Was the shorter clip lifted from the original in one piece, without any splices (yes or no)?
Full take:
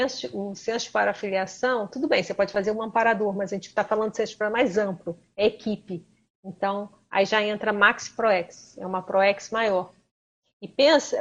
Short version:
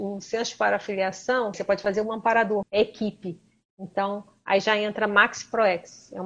no